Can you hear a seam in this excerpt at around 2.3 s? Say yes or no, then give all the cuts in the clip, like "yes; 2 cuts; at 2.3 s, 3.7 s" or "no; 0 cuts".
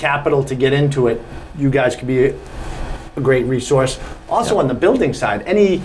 no; 0 cuts